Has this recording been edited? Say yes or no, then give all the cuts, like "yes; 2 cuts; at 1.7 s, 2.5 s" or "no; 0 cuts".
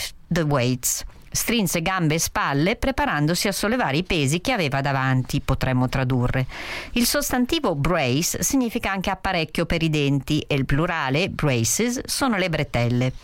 no; 0 cuts